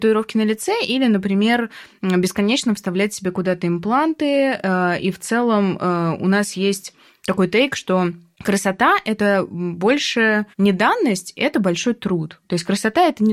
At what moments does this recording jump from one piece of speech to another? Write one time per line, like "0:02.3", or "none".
0:10.5